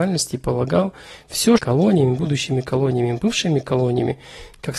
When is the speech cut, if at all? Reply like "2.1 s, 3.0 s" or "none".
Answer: 1.6 s